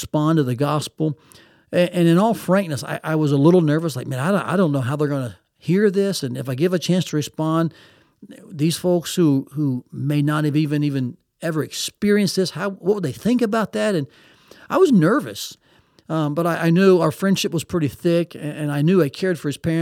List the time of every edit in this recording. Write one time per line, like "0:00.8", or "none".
0:06.2